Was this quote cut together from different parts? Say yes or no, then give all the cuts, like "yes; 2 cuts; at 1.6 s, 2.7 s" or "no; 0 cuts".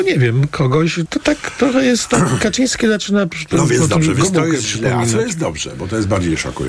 yes; 1 cut; at 1.1 s